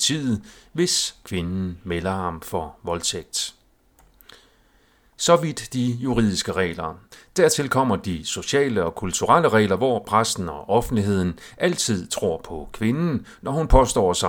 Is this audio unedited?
yes; 0 cuts

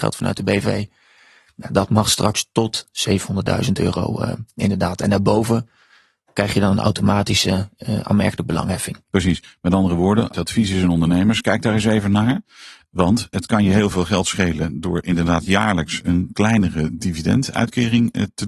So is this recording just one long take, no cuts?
yes; 0 cuts

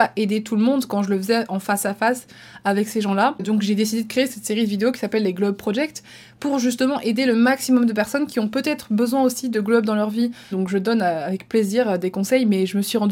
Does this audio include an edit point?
yes; 1 cut; at 10.5 s

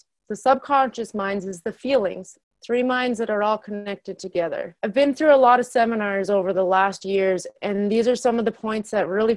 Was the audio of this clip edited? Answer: yes; 2 cuts; at 2.4 s, 4.8 s

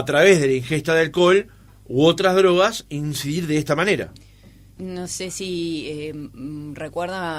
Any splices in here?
yes; 1 cut; at 4.8 s

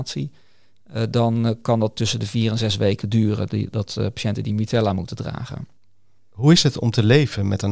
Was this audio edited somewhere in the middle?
no; 0 cuts

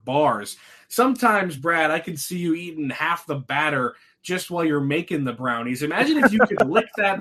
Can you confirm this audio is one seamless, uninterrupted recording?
yes; 0 cuts

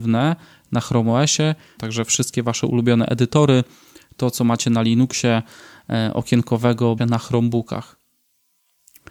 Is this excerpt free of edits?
no; 2 cuts; at 1.8 s, 7.0 s

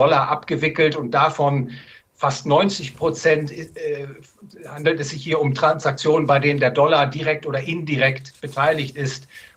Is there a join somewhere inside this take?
no; 0 cuts

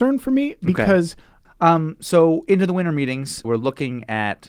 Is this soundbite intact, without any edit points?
no; 2 cuts; at 1.5 s, 3.4 s

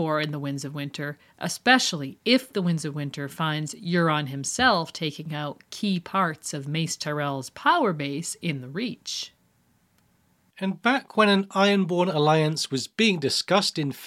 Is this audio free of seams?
no; 1 cut; at 1.3 s

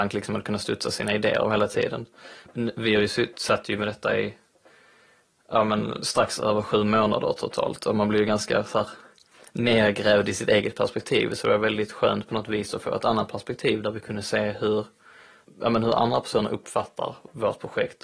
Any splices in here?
no; 0 cuts

